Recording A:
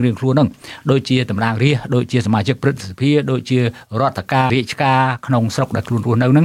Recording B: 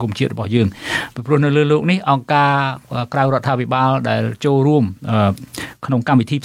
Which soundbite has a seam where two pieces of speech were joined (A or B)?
A